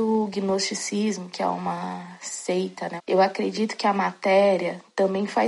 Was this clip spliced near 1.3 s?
no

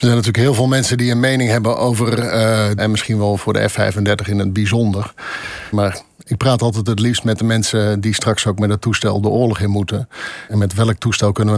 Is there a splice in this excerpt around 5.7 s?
yes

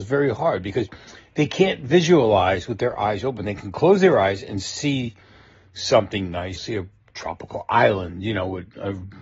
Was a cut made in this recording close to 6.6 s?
yes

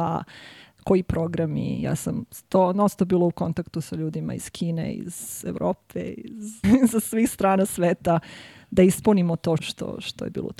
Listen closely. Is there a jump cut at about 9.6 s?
yes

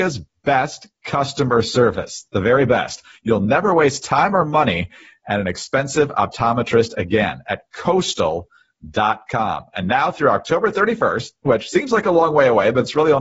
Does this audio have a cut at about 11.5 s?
yes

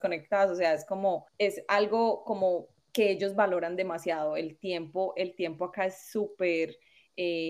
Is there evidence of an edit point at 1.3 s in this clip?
yes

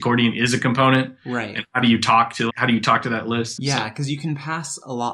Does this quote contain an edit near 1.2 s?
no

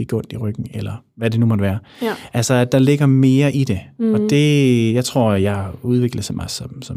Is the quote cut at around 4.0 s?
no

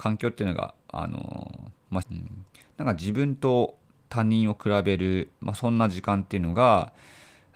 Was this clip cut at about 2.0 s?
yes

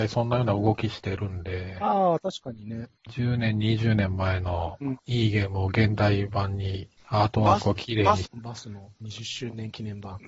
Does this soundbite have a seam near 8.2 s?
yes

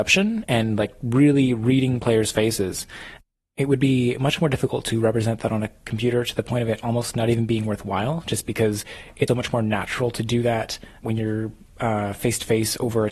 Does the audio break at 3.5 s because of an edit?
no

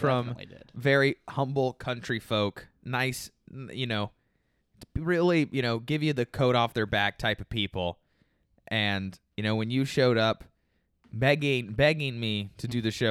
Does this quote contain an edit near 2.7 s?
no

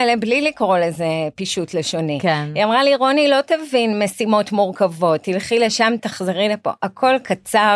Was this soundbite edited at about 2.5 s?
no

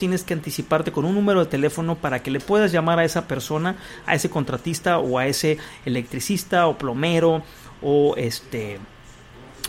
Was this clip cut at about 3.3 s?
no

